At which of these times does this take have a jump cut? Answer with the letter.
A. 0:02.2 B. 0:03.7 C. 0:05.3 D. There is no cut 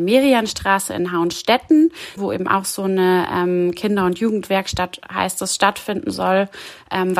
A